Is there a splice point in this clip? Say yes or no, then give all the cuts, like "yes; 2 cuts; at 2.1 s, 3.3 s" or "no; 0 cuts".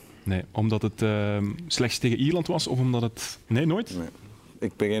yes; 1 cut; at 3.5 s